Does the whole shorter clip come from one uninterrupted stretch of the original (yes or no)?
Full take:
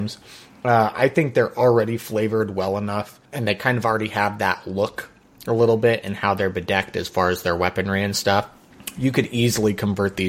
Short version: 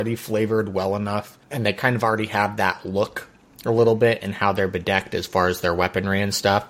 yes